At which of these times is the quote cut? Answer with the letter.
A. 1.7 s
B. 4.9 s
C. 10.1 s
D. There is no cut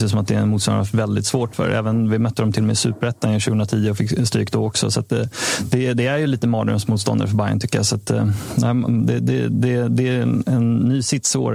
D